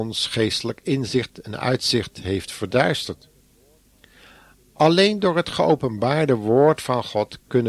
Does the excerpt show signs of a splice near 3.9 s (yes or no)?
no